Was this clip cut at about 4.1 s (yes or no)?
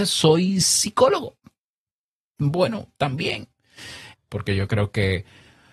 yes